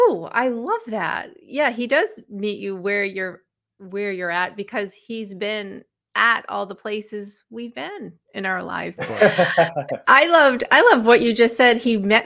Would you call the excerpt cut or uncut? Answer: cut